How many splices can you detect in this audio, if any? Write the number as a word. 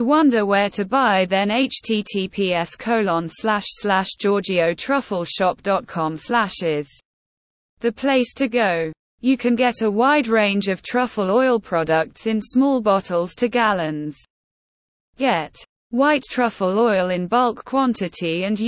zero